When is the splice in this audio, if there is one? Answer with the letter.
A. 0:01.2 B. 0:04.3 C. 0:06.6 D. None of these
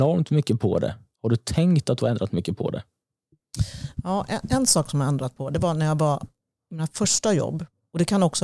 D